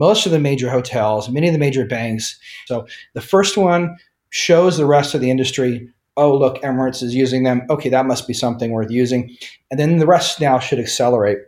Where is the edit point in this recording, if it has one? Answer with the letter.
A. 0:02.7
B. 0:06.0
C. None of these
A